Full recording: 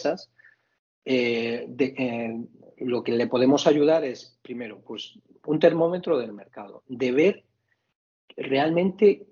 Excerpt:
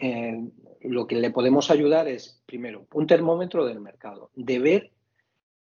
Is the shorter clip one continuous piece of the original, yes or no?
no